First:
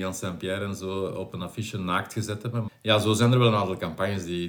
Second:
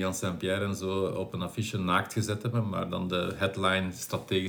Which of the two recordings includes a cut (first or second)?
first